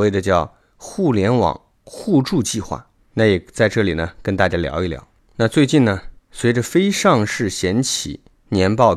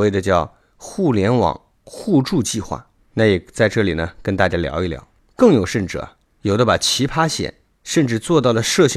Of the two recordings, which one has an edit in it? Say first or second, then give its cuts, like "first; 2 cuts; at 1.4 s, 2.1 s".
second; 1 cut; at 5.3 s